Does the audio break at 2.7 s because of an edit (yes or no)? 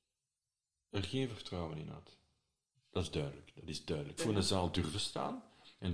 yes